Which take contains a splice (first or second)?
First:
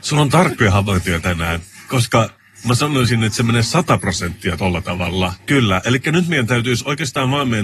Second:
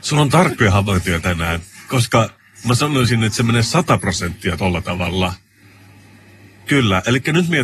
first